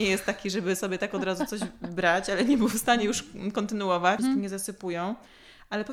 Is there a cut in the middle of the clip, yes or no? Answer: yes